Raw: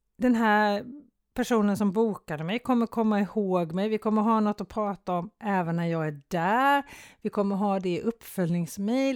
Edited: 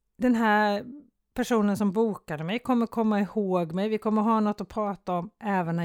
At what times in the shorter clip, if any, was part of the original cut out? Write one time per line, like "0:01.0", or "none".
none